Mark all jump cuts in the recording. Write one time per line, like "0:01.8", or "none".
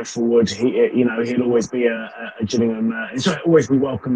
none